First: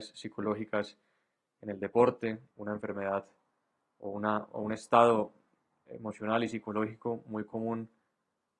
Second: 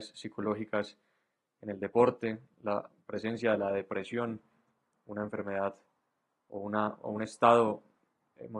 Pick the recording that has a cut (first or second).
first